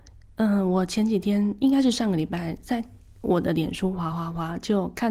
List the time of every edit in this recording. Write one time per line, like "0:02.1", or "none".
none